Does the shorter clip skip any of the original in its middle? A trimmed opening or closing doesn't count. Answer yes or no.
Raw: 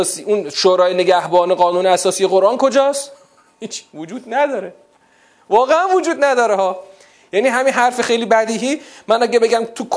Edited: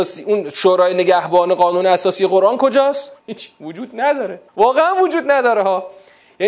yes